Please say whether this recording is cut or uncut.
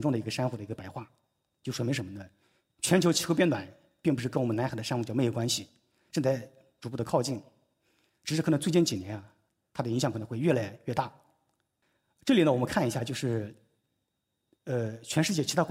uncut